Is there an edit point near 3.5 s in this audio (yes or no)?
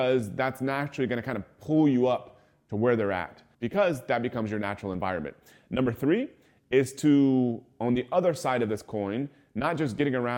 yes